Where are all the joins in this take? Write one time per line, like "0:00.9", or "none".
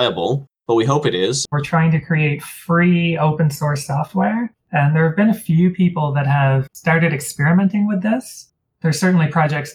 0:01.5